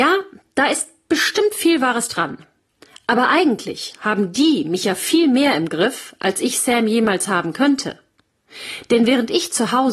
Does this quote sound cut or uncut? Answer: uncut